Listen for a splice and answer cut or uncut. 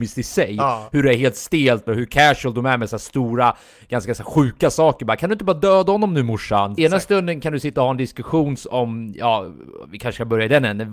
cut